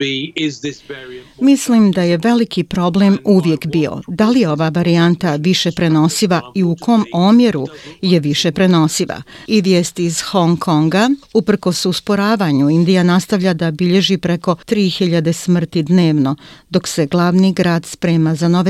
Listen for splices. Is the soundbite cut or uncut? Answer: cut